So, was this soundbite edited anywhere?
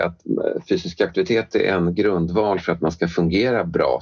no; 0 cuts

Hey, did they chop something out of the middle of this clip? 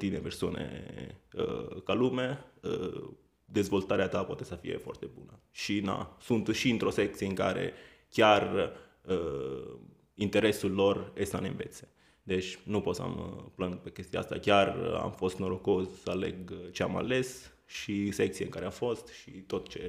no; 0 cuts

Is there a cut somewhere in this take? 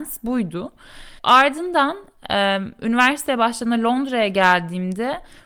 no; 0 cuts

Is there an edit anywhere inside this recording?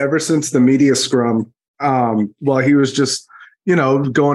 no; 0 cuts

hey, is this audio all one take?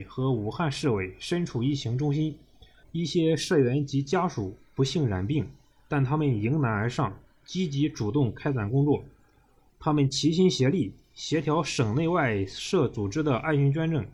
no; 2 cuts; at 2.8 s, 9.7 s

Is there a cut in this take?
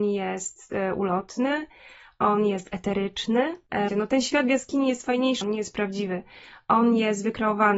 yes; 2 cuts; at 3.9 s, 5.4 s

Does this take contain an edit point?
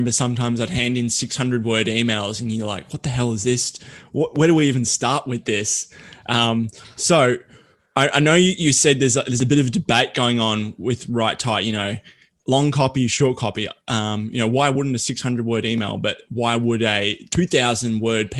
no; 0 cuts

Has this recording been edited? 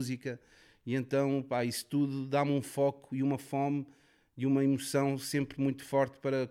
no; 0 cuts

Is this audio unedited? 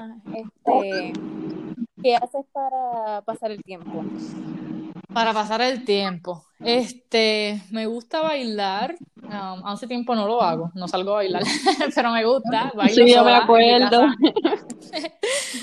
yes; 0 cuts

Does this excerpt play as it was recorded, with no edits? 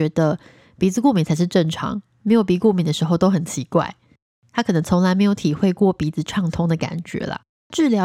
yes; 0 cuts

